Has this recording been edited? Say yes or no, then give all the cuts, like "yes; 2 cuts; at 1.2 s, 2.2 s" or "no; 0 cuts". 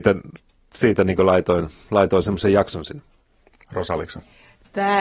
no; 0 cuts